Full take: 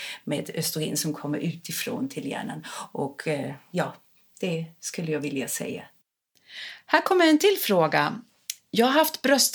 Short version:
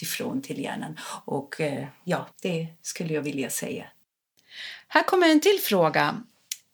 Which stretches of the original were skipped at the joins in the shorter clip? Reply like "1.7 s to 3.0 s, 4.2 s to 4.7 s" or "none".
4.0 s to 4.3 s